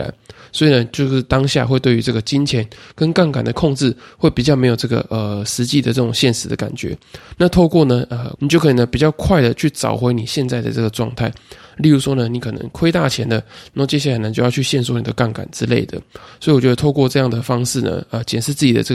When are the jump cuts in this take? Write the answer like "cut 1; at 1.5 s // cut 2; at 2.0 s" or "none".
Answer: cut 1; at 8.4 s

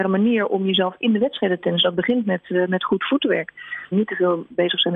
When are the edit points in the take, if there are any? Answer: cut 1; at 3.9 s

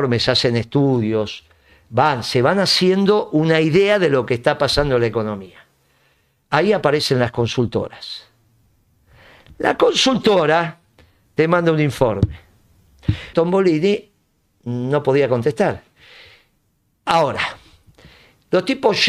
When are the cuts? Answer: cut 1; at 13.3 s

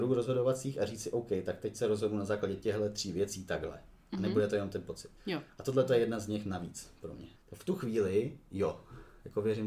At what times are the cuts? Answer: cut 1; at 7.4 s

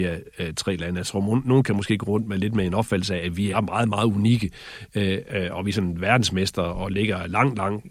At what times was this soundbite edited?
cut 1; at 3.5 s

